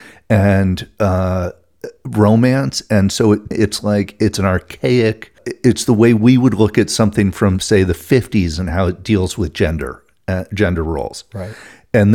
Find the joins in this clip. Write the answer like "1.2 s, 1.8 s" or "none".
3.5 s